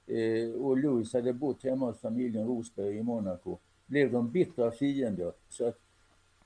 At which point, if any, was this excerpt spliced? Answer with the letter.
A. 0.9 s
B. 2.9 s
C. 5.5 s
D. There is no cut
C